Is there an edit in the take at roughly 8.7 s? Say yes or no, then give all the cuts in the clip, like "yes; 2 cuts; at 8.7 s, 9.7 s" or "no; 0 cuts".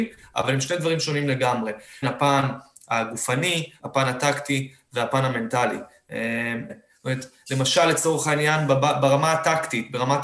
no; 3 cuts; at 2.0 s, 3.8 s, 6.7 s